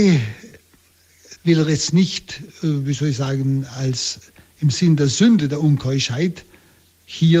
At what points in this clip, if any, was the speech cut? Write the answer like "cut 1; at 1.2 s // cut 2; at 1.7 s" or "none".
cut 1; at 1.3 s